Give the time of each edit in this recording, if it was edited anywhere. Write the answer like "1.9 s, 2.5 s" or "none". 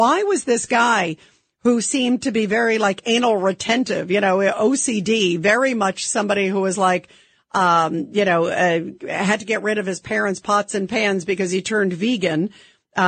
none